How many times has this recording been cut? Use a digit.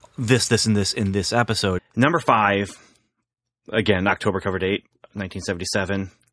1